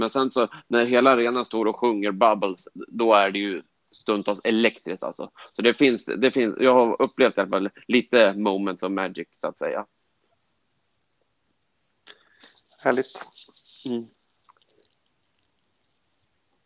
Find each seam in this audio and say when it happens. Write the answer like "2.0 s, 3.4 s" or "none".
none